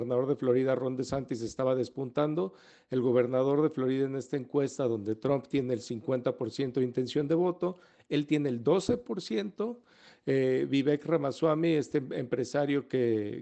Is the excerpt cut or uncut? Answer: uncut